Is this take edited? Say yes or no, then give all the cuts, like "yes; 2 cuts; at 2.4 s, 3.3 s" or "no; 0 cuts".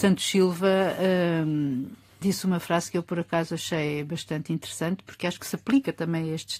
yes; 1 cut; at 2.2 s